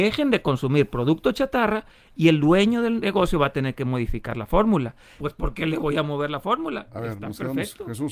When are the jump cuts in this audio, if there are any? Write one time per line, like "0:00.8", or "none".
0:05.2

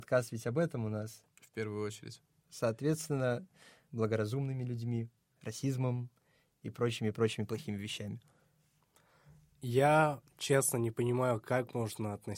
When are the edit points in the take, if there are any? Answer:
0:03.9
0:05.3

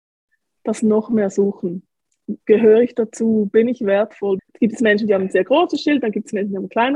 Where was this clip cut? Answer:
0:02.4
0:04.4

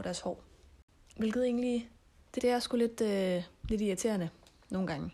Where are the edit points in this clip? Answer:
0:01.1
0:02.4

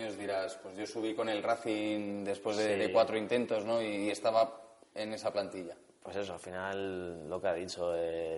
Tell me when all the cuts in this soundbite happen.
none

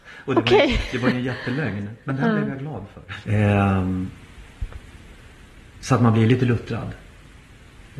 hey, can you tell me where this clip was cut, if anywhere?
0:03.2

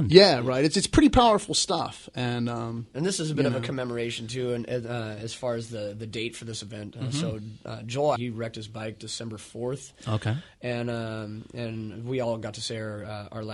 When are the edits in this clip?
0:08.2

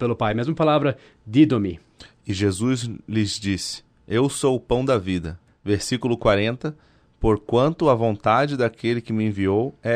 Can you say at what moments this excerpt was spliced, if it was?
0:05.5

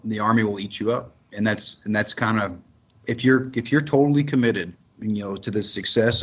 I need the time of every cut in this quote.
none

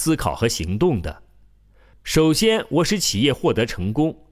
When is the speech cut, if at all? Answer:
none

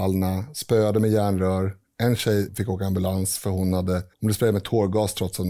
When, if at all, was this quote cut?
0:02.5
0:04.1

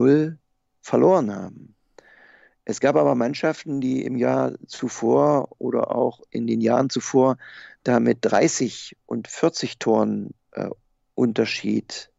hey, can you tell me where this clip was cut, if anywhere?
none

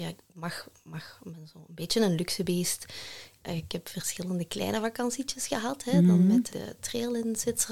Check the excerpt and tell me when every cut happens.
0:06.5

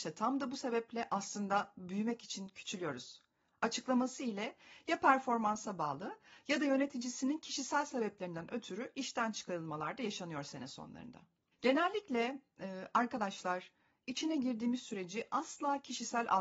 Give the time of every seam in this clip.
0:11.5

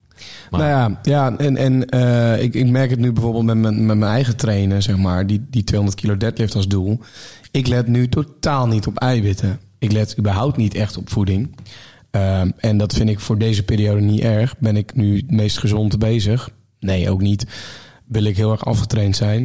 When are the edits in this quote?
none

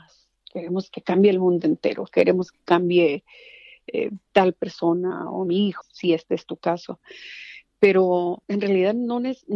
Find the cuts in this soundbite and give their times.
0:05.8

